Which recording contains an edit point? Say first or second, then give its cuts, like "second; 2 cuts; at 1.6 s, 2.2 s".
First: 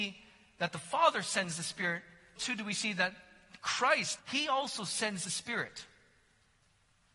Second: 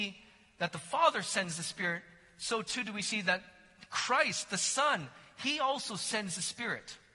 first; 2 cuts; at 2.4 s, 4.2 s